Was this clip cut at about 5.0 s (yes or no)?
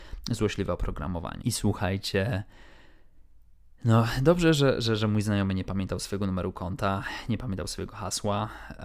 no